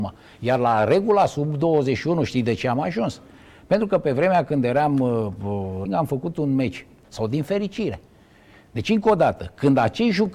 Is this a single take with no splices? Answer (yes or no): no